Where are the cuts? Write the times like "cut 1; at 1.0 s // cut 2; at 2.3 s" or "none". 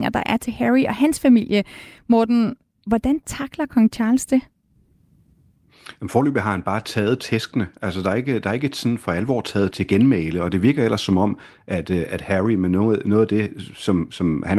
cut 1; at 9.7 s